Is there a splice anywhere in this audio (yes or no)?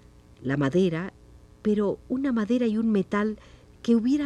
yes